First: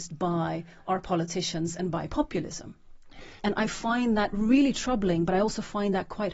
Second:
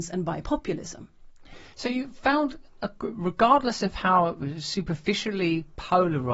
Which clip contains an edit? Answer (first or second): first